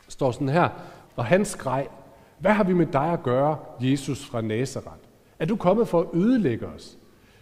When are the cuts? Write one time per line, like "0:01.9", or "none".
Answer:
0:01.0